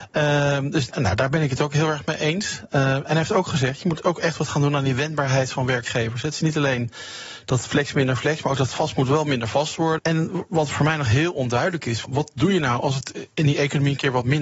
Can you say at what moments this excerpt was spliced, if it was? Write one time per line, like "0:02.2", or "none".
0:10.0
0:12.0

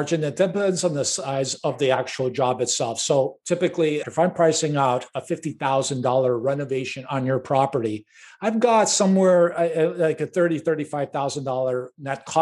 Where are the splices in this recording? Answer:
0:04.0

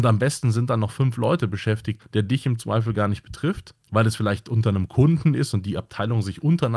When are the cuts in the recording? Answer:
0:02.0
0:03.8

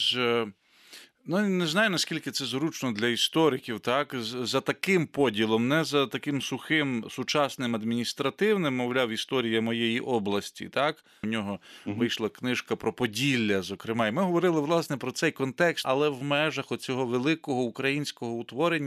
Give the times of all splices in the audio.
0:11.2
0:15.8

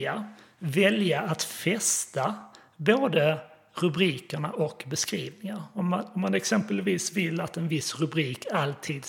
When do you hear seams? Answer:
none

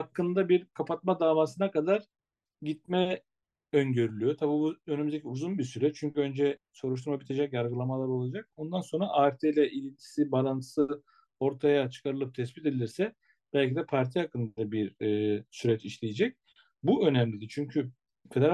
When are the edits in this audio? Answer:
none

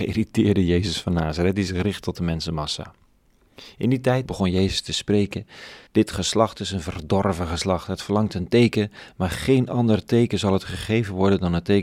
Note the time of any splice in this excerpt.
0:04.2
0:05.9

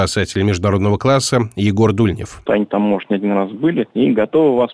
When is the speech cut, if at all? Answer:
0:02.5

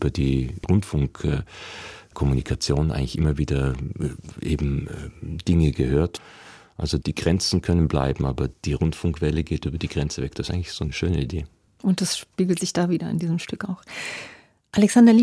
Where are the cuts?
0:07.0

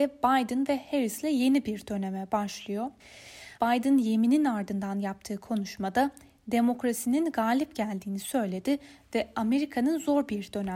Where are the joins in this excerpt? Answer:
0:03.6

